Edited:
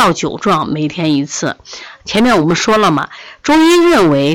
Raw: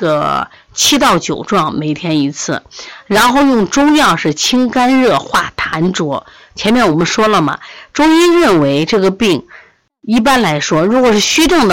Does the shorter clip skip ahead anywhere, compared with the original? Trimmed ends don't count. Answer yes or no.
yes